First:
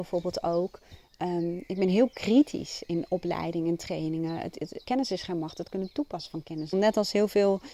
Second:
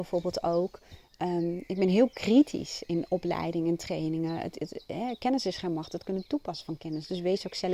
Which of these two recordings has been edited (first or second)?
first